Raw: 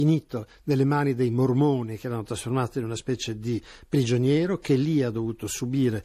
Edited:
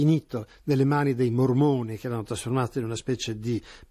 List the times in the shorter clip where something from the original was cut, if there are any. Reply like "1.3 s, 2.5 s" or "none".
none